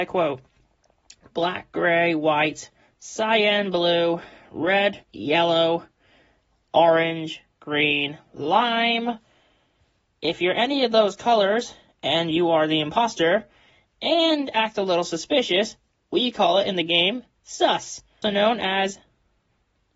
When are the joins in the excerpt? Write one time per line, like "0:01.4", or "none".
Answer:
0:05.0
0:18.2